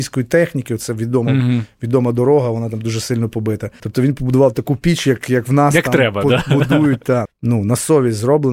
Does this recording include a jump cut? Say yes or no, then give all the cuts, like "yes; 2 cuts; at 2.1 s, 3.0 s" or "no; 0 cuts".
yes; 2 cuts; at 3.8 s, 7.3 s